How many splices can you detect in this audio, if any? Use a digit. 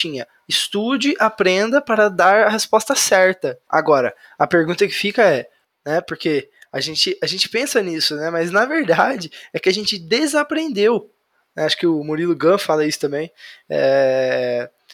2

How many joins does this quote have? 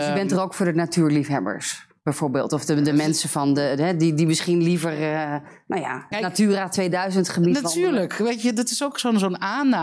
1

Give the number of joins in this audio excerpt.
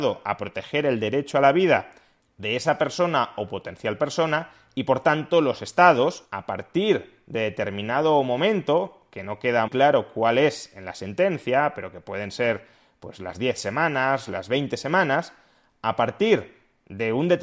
2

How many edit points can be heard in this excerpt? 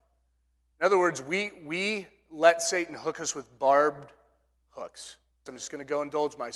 1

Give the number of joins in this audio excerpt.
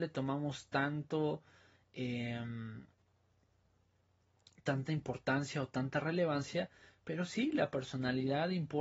0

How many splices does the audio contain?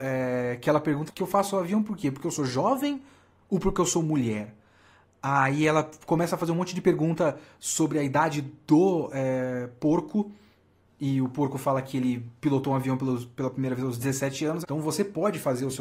2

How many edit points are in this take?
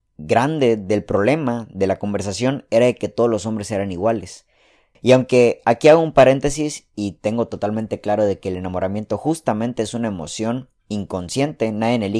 2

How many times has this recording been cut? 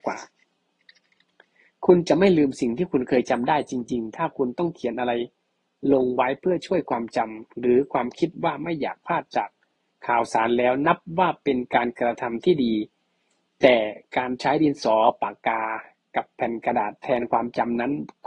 0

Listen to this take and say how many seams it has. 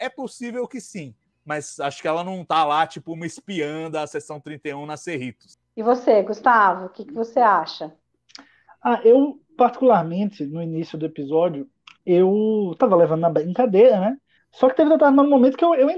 0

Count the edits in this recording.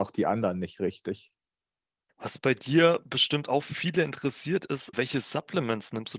2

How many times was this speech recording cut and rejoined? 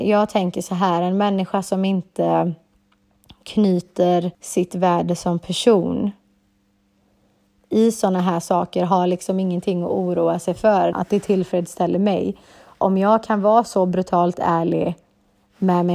2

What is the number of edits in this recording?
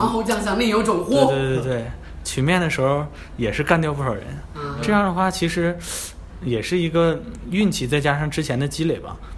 0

